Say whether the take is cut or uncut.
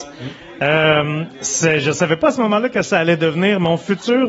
uncut